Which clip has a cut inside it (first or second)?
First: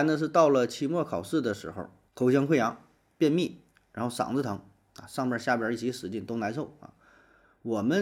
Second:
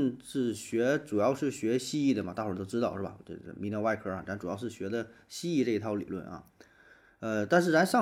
first